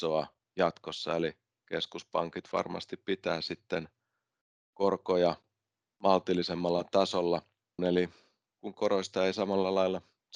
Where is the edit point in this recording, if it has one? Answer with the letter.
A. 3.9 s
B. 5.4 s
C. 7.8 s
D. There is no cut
C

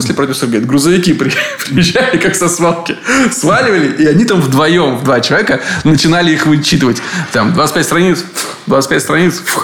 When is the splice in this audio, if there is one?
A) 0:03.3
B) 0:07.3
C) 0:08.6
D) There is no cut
D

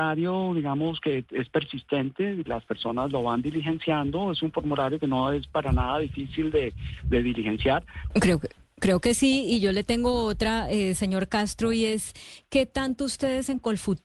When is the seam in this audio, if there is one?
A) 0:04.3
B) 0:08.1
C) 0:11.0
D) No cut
B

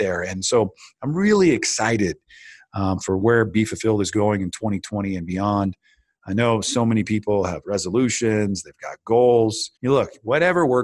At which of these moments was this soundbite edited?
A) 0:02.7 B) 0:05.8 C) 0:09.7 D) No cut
C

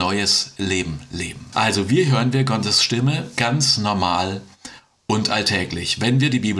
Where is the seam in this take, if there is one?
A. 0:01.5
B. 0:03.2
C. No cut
A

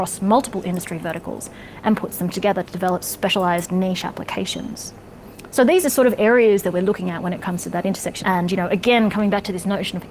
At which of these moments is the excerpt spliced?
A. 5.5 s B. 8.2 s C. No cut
B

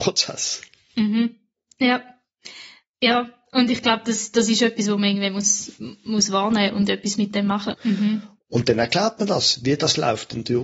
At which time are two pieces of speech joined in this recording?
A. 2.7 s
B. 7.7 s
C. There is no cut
B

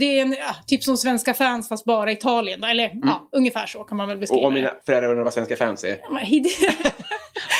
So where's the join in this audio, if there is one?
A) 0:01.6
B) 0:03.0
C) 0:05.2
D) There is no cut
D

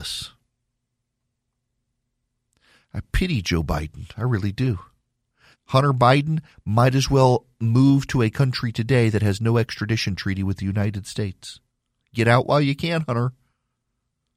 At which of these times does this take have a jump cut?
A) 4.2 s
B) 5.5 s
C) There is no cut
B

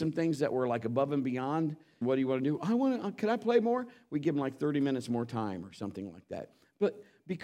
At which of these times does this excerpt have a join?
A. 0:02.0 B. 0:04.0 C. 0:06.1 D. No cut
A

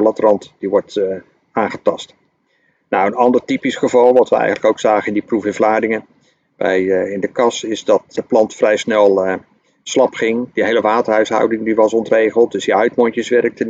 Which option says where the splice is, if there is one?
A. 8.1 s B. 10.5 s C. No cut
A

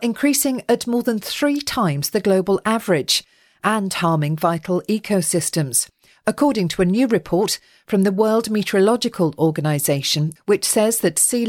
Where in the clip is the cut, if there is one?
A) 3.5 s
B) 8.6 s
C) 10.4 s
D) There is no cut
C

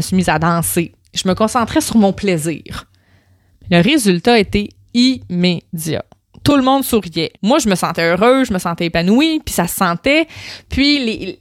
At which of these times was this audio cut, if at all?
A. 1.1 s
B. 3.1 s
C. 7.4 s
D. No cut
C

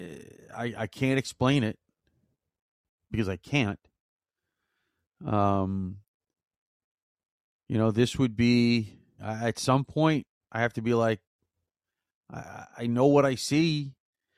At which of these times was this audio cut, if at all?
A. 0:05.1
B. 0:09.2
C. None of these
B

